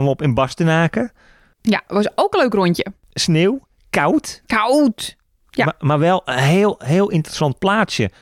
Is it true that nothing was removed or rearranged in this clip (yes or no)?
yes